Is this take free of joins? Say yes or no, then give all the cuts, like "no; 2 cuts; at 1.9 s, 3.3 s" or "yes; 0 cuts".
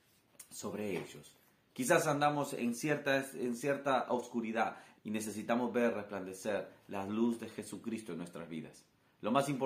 no; 2 cuts; at 1.7 s, 4.9 s